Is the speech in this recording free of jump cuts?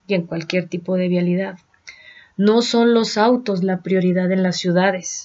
yes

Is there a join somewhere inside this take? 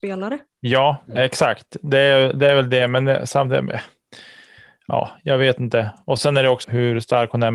yes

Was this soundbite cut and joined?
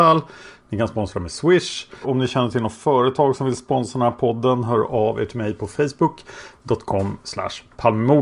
yes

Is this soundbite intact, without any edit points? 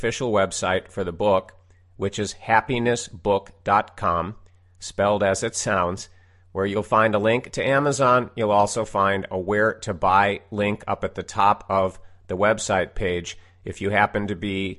yes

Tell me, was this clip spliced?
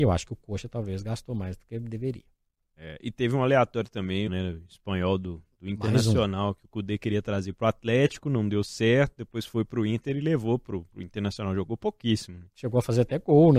yes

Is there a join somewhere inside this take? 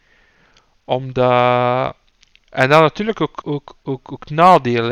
yes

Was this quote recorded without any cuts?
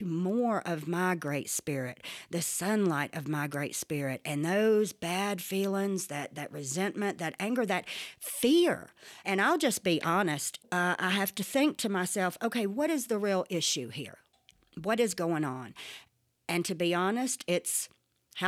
yes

